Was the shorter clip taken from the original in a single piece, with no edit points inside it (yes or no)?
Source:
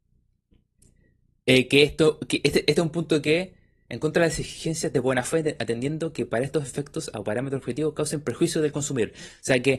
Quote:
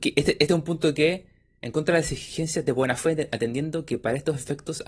yes